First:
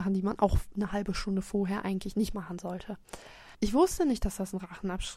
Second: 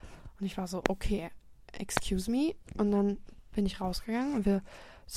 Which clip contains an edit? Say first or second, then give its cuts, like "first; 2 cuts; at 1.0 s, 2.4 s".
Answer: first; 1 cut; at 3.5 s